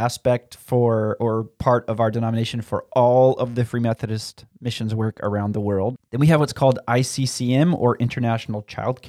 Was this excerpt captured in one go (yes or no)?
no